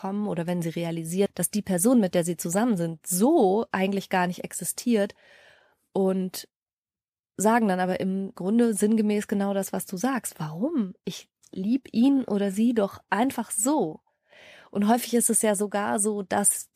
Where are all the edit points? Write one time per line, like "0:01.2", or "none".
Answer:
none